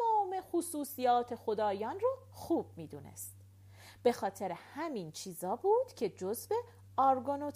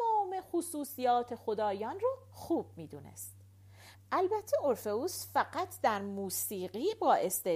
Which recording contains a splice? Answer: second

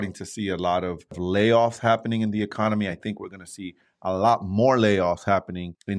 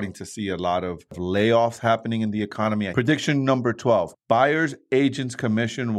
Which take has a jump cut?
second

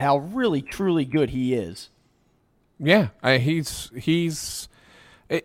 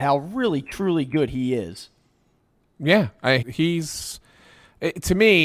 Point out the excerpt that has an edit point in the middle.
second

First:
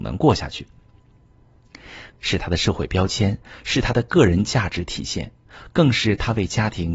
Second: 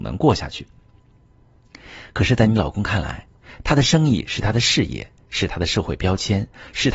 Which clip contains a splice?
first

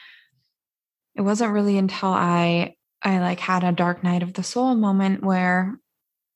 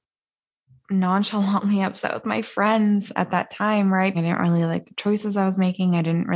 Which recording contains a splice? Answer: second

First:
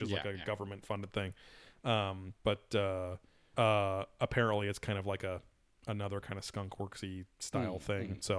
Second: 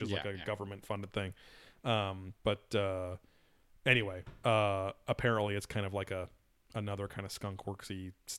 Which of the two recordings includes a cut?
first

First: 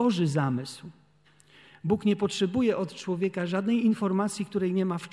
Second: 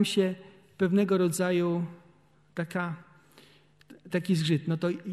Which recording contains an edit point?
second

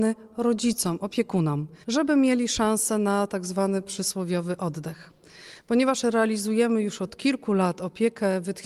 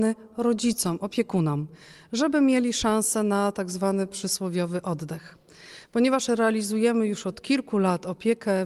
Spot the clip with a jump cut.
first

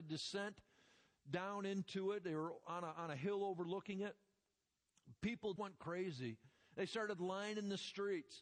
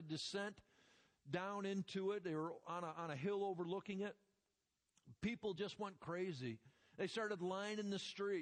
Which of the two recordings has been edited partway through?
first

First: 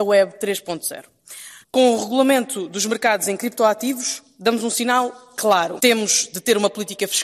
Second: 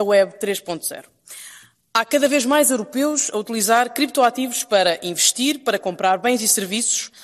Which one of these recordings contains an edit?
first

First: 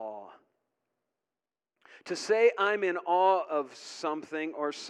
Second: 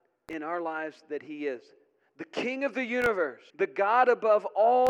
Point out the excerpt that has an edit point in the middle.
second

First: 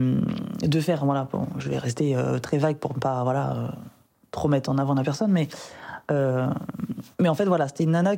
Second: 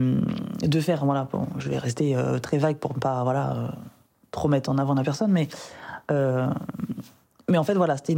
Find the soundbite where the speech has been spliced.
first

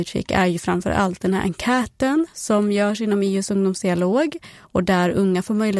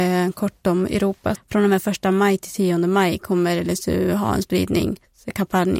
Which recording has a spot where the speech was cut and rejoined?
second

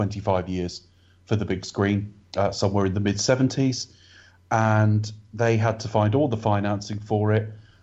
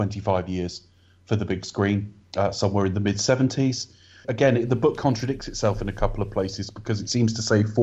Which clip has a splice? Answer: second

